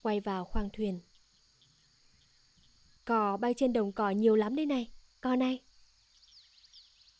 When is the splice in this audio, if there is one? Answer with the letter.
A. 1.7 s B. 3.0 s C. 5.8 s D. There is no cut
B